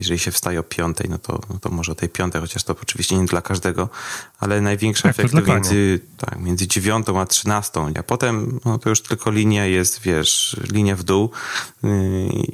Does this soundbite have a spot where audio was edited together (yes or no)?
yes